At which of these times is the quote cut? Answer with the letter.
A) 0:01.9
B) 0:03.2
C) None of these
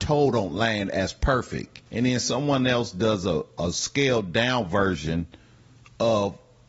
A